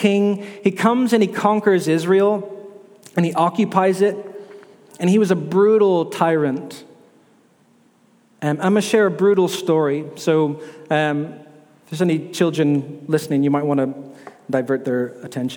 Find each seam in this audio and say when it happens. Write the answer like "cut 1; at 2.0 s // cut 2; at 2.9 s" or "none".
none